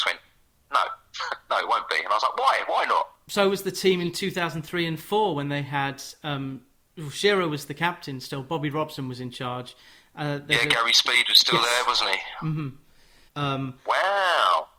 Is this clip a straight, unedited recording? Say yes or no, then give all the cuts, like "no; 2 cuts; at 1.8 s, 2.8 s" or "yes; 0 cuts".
no; 1 cut; at 13.3 s